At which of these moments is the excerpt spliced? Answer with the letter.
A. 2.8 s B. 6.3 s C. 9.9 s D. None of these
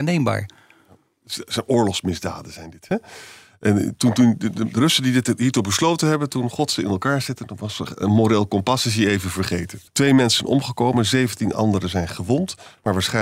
C